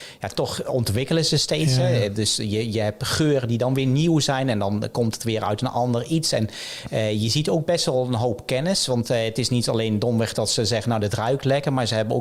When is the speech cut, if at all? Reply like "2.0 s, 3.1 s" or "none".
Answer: none